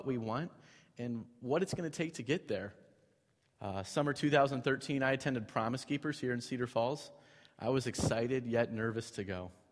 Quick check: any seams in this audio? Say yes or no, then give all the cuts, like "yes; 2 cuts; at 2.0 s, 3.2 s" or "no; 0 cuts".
yes; 1 cut; at 3.6 s